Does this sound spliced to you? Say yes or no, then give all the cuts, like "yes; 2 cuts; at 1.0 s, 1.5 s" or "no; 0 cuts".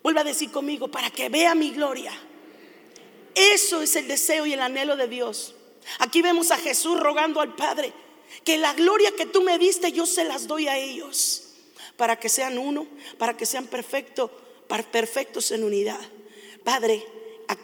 yes; 1 cut; at 16.6 s